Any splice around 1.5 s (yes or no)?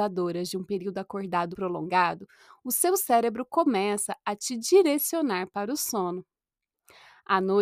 yes